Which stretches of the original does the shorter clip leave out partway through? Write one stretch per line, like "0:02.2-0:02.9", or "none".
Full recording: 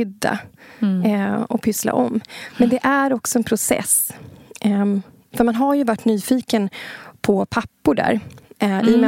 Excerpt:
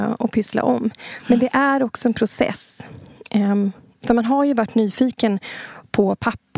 none